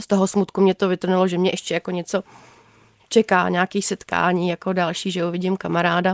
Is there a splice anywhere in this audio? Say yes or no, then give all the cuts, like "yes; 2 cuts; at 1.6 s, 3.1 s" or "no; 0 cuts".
no; 0 cuts